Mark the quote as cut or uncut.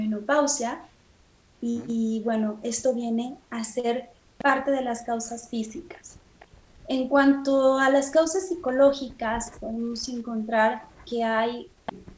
uncut